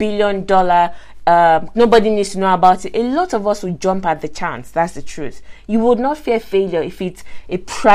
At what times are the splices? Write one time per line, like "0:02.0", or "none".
0:01.7